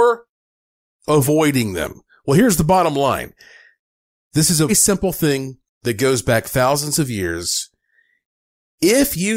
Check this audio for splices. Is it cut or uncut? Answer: cut